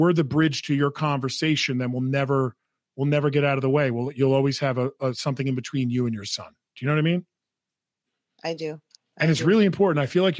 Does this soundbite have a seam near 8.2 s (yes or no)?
no